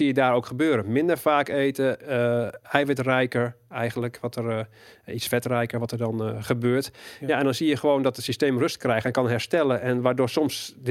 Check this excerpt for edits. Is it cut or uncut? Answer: uncut